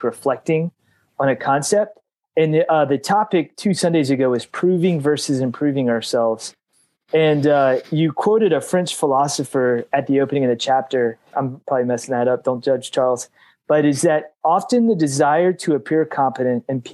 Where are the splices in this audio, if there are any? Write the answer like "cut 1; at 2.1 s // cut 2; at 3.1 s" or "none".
cut 1; at 11.3 s